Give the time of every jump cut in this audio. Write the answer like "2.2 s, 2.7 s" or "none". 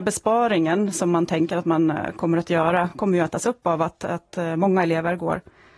none